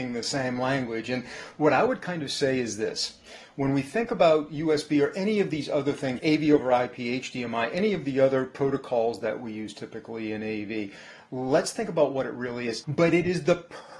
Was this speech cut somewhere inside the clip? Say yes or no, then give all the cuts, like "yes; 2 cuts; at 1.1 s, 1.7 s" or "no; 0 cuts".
yes; 2 cuts; at 6.2 s, 12.8 s